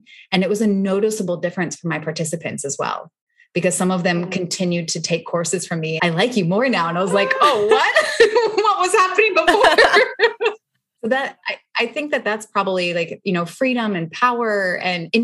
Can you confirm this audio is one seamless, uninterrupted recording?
no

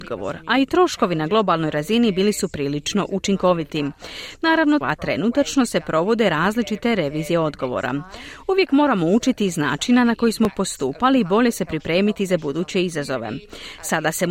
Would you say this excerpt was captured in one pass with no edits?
no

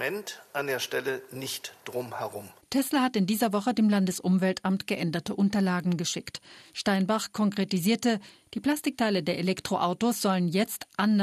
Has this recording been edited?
no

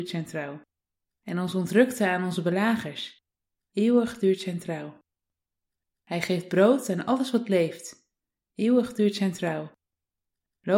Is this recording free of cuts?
no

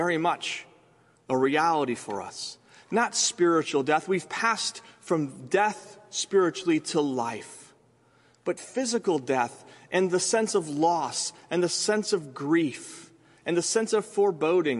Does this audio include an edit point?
no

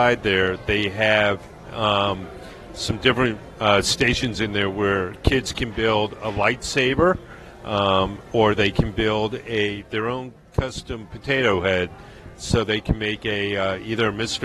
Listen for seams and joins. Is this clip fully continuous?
yes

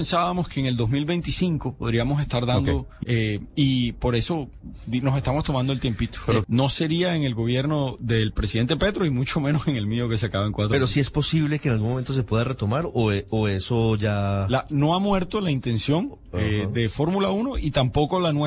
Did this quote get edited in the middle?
yes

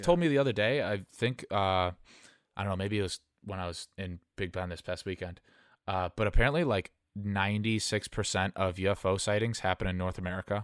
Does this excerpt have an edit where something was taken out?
no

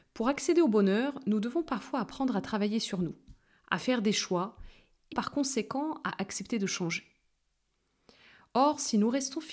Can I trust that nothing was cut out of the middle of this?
no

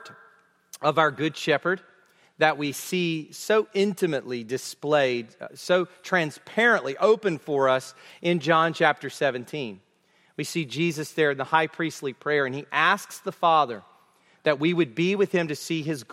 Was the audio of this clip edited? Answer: no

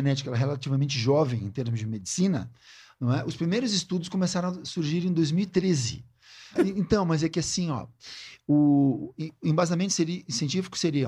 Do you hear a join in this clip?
yes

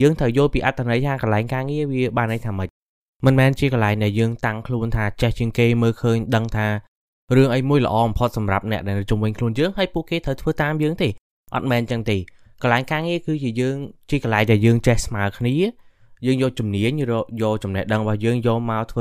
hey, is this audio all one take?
yes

